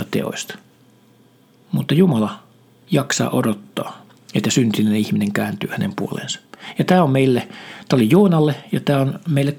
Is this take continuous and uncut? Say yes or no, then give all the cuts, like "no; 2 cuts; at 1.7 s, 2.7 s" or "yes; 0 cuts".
yes; 0 cuts